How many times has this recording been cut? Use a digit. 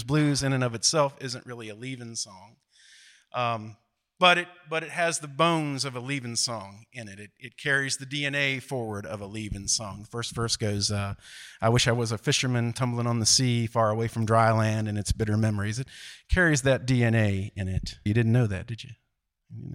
1